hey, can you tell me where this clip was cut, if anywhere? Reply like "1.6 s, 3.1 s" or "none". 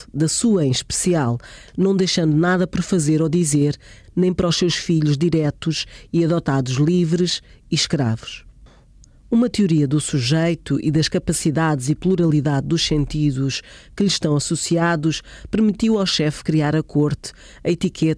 4.0 s